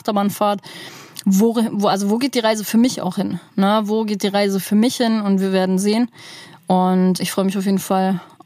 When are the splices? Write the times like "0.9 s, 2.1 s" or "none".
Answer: 7.2 s